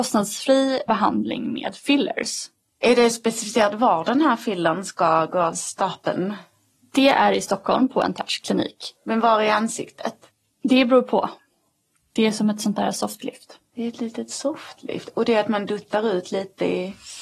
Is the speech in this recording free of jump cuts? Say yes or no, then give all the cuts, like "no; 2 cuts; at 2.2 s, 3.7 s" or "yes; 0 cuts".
yes; 0 cuts